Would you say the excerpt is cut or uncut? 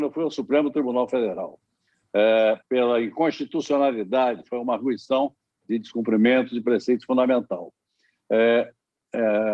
uncut